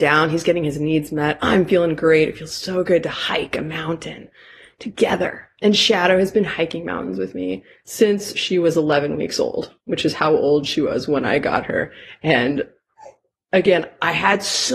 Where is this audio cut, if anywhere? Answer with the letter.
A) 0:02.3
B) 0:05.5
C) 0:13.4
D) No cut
D